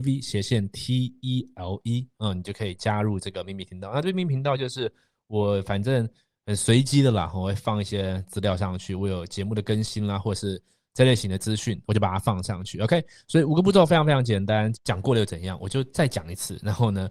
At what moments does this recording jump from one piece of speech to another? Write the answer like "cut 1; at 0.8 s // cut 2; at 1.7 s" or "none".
cut 1; at 11.8 s // cut 2; at 14.7 s